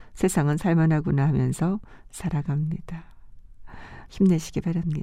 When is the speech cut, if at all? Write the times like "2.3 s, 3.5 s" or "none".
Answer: 4.1 s